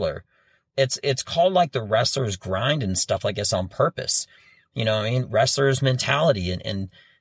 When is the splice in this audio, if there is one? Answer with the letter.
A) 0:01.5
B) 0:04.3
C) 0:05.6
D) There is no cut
D